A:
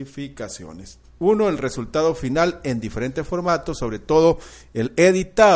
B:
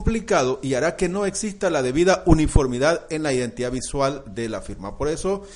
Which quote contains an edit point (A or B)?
A